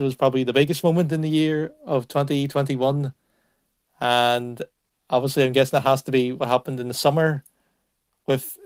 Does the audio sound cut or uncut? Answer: uncut